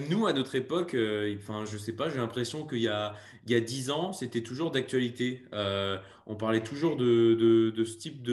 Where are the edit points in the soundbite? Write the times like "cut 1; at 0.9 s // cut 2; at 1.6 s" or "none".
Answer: none